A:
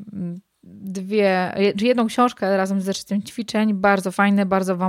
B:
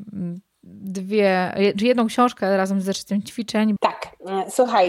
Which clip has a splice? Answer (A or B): B